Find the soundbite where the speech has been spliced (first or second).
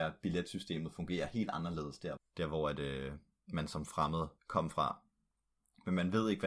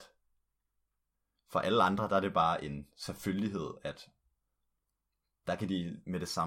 first